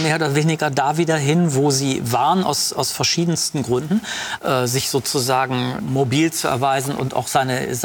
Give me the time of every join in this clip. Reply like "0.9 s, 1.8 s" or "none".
4.4 s, 5.8 s